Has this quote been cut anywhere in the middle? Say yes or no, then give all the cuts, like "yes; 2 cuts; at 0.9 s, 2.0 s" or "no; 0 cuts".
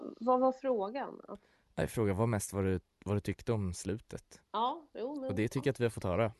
no; 0 cuts